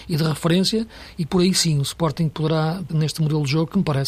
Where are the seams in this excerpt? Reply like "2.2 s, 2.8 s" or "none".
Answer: 2.9 s

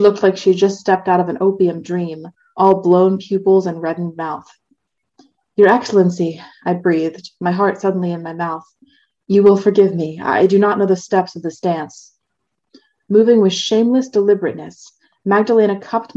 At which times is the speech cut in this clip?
none

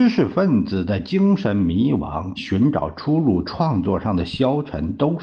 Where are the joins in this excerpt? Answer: 2.4 s

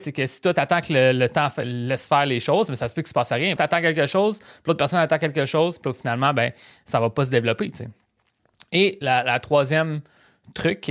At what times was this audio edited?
3.6 s

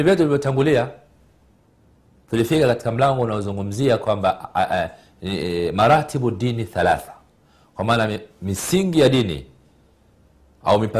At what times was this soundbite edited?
none

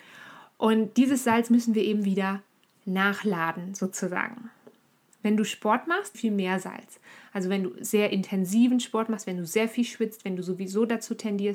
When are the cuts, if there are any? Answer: 6.1 s

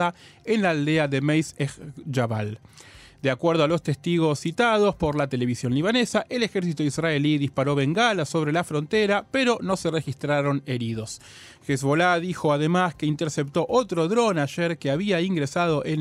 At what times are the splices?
none

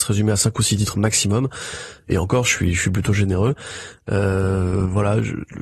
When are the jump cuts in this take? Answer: none

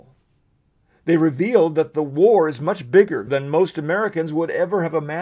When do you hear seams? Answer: 3.3 s

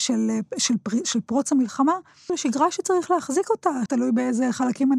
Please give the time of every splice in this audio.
2.3 s, 3.9 s

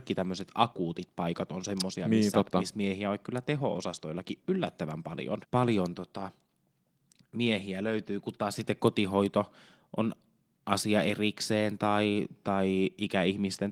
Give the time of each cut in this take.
5.4 s

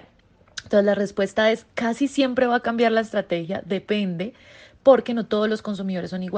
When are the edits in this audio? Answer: none

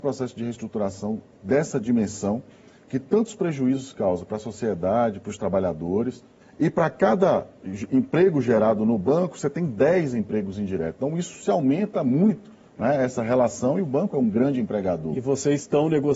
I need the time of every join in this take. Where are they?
6.4 s

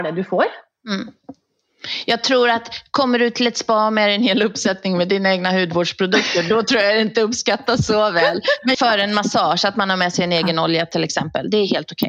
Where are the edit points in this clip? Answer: 8.7 s

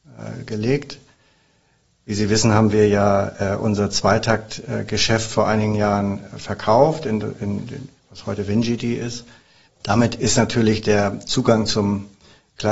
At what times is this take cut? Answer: 9.7 s

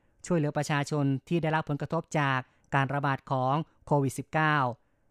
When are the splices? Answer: none

